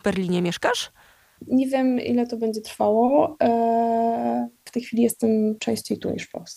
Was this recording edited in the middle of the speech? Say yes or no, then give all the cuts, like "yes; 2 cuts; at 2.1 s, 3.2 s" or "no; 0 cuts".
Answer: yes; 2 cuts; at 1.5 s, 4.7 s